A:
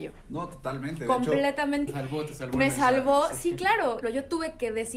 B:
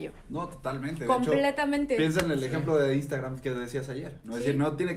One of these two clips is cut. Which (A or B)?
A